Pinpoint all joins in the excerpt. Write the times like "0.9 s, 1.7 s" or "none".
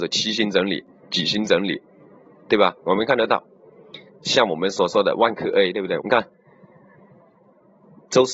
2.8 s, 6.0 s